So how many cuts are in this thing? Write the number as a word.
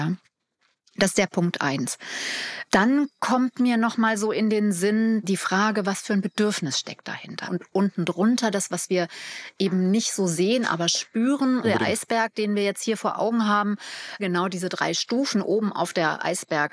three